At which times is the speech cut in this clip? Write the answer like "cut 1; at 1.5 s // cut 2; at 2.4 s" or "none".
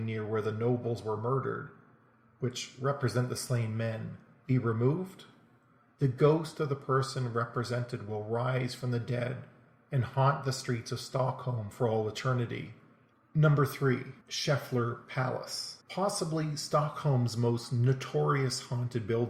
cut 1; at 13.1 s // cut 2; at 14.2 s // cut 3; at 15.8 s